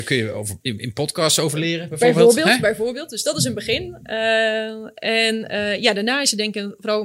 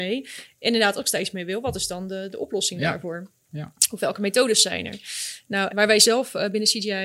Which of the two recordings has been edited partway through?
second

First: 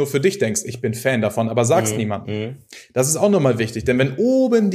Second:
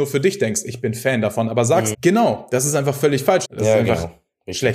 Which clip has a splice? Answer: second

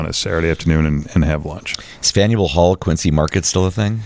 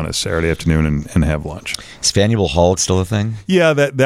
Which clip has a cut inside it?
second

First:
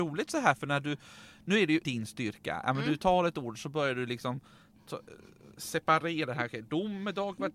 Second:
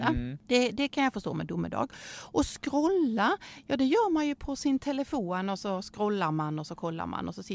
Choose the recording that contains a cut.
first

